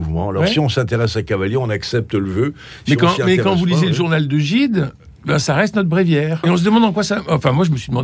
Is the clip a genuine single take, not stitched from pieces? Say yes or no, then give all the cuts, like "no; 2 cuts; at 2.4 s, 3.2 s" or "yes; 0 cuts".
no; 1 cut; at 6.4 s